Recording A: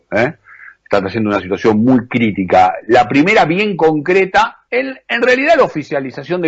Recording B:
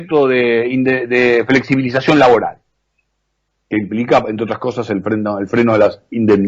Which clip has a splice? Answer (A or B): A